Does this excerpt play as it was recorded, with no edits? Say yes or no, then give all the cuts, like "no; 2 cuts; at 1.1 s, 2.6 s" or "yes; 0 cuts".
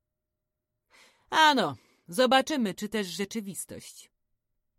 no; 1 cut; at 2.7 s